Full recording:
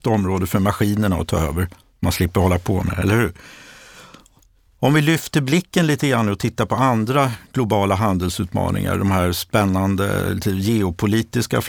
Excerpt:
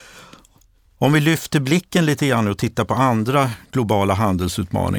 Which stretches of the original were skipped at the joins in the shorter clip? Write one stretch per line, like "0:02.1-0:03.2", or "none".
none